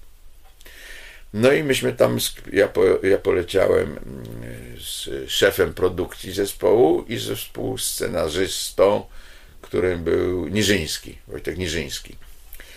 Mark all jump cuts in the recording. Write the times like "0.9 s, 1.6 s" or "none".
none